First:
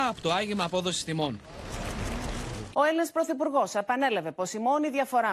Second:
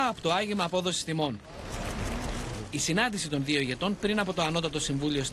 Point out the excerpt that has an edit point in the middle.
first; 1 cut; at 2.7 s

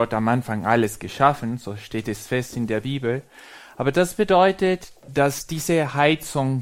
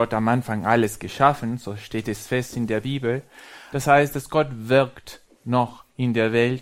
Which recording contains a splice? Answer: second; 1 cut; at 3.7 s

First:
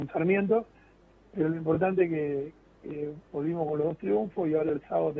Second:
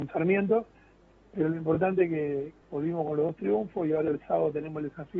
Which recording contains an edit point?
second; 1 cut; at 2.6 s

